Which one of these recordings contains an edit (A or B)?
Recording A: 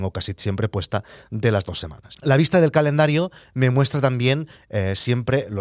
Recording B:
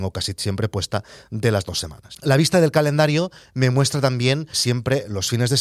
B